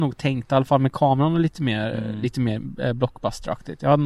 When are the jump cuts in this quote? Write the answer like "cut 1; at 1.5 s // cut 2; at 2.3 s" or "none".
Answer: none